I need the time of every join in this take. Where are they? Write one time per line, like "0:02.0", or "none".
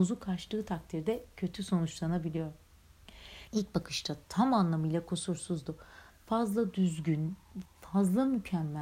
0:03.5
0:06.1
0:07.7